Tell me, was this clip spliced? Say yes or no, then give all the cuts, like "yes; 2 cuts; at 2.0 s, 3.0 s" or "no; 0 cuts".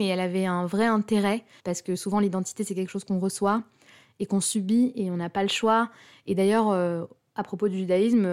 yes; 1 cut; at 1.6 s